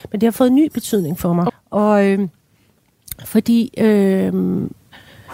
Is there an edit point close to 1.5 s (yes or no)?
yes